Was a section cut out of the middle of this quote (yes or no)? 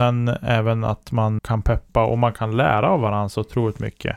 yes